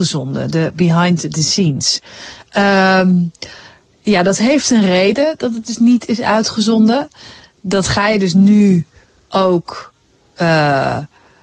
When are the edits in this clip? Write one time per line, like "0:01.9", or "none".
none